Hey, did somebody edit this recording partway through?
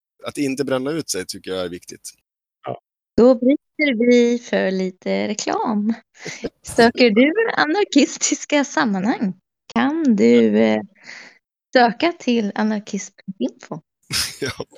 no; 0 cuts

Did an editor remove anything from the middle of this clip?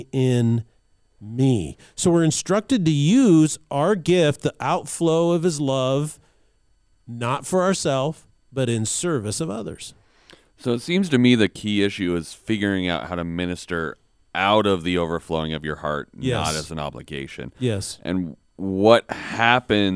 no; 0 cuts

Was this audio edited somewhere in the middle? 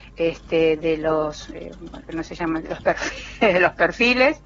yes; 1 cut; at 2.0 s

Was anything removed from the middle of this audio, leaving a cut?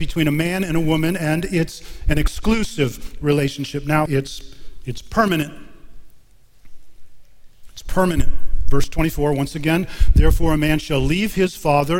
yes; 1 cut; at 4.1 s

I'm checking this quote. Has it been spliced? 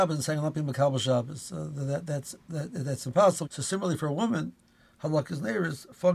yes; 1 cut; at 3.4 s

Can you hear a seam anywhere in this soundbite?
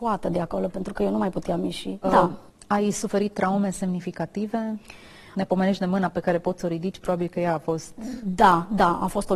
yes; 1 cut; at 2.0 s

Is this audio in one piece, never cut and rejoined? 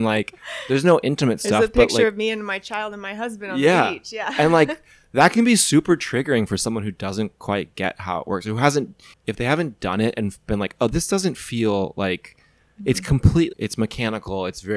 no; 2 cuts; at 9.1 s, 13.5 s

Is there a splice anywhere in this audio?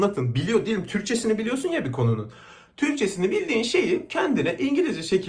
no; 0 cuts

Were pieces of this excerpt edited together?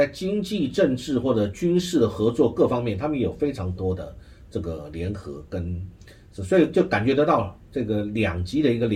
no; 0 cuts

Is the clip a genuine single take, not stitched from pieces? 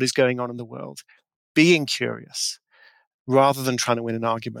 no; 1 cut; at 3.1 s

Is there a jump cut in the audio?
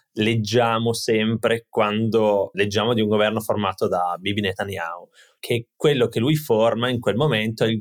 yes; 2 cuts; at 2.5 s, 5.4 s

